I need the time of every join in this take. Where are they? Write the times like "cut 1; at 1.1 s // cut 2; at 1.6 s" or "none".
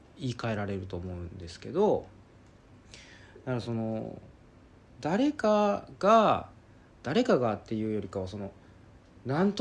none